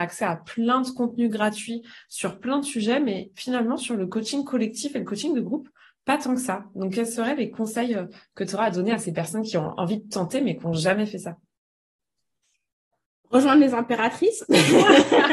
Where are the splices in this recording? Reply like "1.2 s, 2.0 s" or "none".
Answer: none